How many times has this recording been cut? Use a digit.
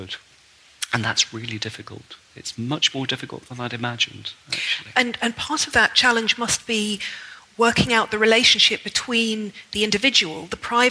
0